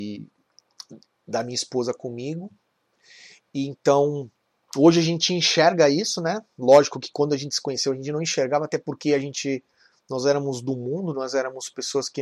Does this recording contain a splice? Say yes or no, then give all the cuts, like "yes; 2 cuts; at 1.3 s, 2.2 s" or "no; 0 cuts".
no; 0 cuts